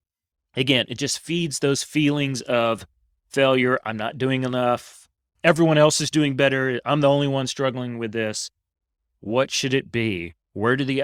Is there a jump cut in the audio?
yes; 1 cut; at 9.1 s

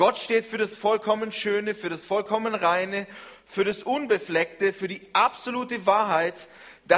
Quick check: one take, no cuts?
yes; 0 cuts

